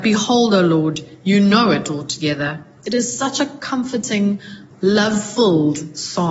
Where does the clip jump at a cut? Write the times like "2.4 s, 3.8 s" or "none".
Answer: 2.8 s, 4.7 s